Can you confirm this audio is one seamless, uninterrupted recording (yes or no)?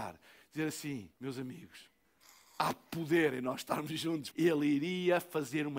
no